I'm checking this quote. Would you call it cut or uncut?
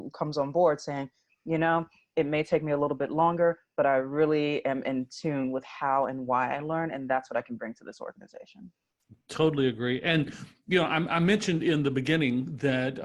uncut